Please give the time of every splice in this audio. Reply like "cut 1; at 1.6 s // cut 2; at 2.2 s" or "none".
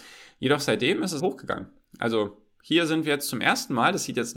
cut 1; at 1.2 s